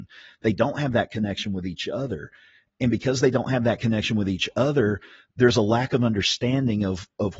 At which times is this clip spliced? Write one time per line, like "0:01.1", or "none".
none